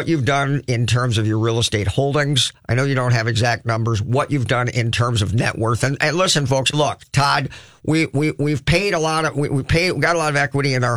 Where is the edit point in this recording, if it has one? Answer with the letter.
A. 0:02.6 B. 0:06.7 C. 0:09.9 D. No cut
B